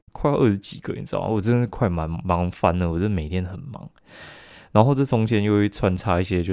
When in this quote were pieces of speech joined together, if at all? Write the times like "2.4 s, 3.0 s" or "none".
none